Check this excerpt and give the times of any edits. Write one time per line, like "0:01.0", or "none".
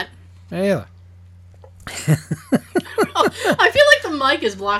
none